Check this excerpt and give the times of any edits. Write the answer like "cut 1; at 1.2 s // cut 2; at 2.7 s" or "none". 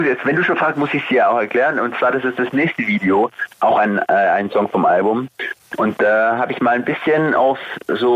cut 1; at 3.5 s